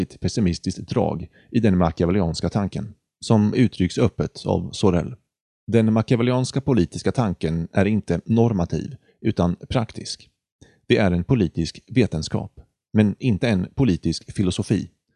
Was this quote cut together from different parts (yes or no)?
no